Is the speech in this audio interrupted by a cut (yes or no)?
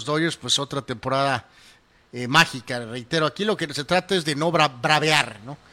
no